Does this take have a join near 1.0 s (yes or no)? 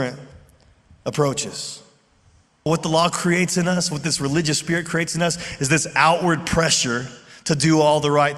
no